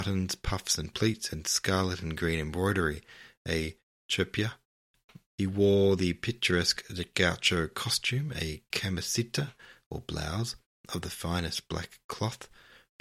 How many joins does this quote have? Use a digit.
1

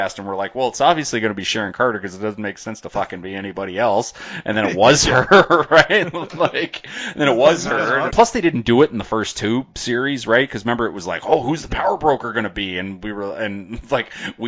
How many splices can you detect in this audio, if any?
1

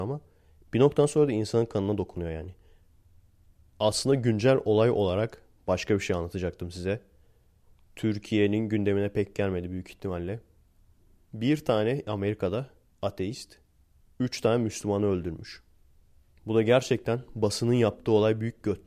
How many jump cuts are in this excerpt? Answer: 0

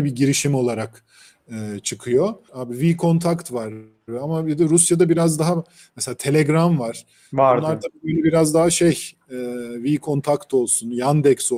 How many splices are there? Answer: 1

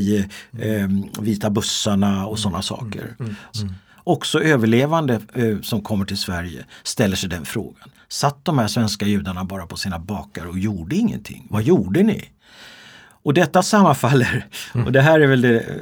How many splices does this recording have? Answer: 1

